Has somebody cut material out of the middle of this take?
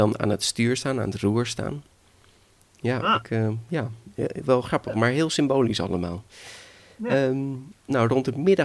yes; 1 cut; at 4.4 s

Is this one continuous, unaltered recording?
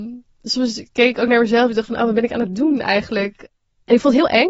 yes; 0 cuts

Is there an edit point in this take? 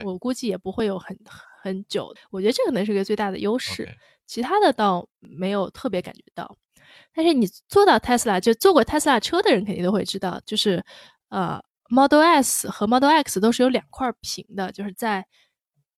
yes; 1 cut; at 2.2 s

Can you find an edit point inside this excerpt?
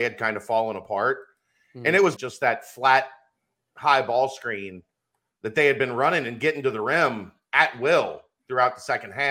yes; 1 cut; at 2.2 s

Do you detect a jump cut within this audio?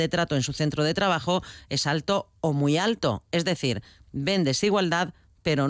no; 0 cuts

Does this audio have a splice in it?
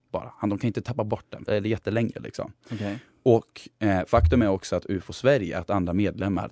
yes; 1 cut; at 1.4 s

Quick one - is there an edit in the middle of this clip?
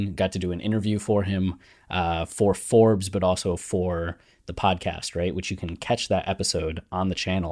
no; 0 cuts

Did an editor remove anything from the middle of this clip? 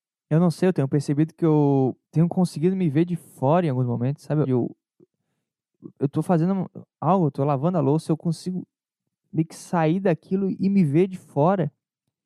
yes; 2 cuts; at 2.0 s, 4.4 s

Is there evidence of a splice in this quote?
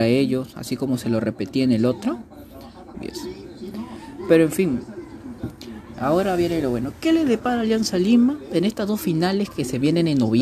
yes; 1 cut; at 2.9 s

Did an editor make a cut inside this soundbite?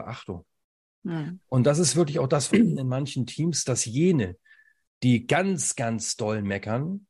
yes; 1 cut; at 2.5 s

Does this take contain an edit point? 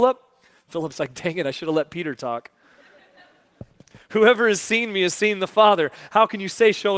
no; 0 cuts

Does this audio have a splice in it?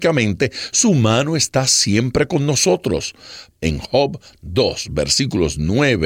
yes; 1 cut; at 3.5 s

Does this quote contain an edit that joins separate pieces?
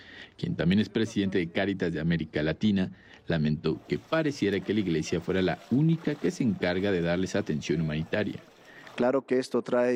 yes; 1 cut; at 9.0 s

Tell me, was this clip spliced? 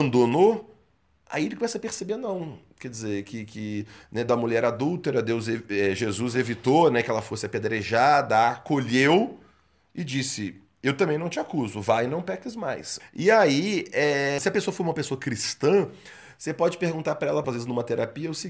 yes; 3 cuts; at 13.0 s, 14.4 s, 17.4 s

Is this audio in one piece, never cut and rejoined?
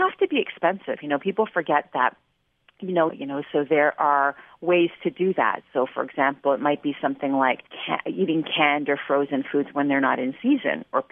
no; 2 cuts; at 3.1 s, 7.7 s

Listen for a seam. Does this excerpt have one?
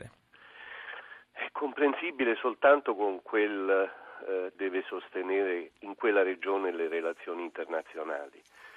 yes; 1 cut; at 4.5 s

